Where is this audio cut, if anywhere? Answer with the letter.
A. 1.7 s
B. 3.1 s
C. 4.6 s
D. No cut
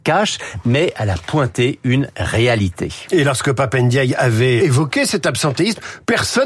C